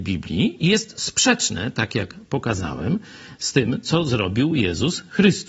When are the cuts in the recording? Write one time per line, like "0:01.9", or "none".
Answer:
none